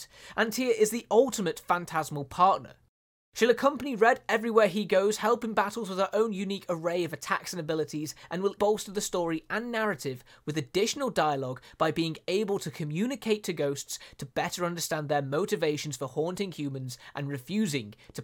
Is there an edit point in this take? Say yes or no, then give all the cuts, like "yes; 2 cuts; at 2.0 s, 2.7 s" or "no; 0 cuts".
yes; 1 cut; at 8.6 s